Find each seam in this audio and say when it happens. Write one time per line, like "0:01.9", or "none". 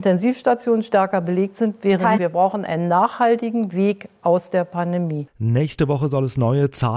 0:02.2